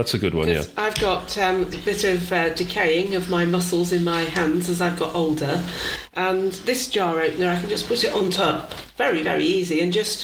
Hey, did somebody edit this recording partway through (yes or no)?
no